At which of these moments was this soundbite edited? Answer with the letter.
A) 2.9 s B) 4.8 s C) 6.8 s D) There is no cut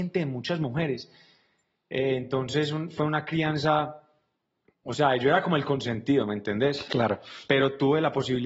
D